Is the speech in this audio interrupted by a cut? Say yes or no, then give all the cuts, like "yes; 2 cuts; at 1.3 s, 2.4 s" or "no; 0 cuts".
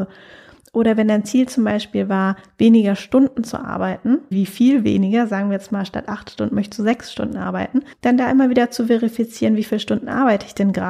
yes; 2 cuts; at 4.3 s, 7.9 s